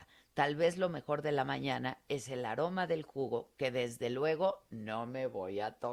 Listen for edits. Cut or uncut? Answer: uncut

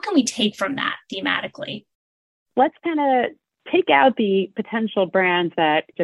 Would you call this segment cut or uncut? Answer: uncut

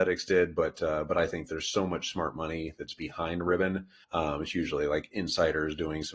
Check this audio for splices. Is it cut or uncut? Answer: cut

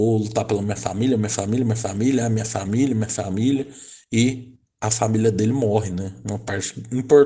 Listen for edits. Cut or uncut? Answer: uncut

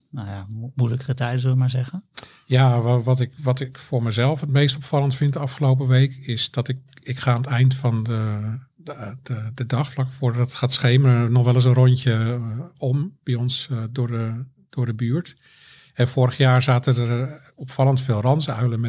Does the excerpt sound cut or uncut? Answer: cut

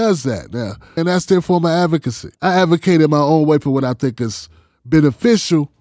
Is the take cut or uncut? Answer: cut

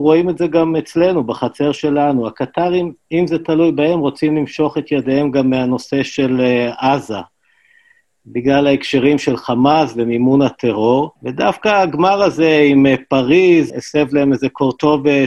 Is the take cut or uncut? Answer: cut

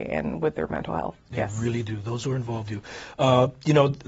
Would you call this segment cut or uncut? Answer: cut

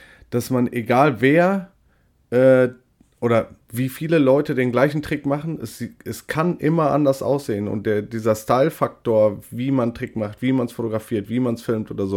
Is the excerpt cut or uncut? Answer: uncut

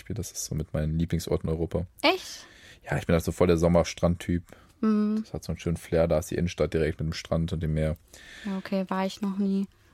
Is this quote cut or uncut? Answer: uncut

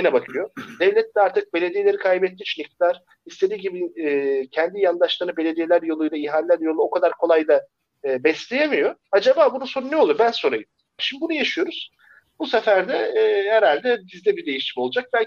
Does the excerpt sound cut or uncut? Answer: cut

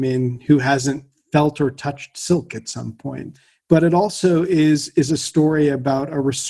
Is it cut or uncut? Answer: cut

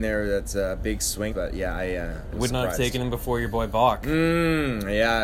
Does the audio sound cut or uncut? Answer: cut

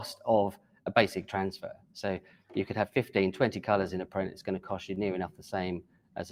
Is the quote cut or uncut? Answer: uncut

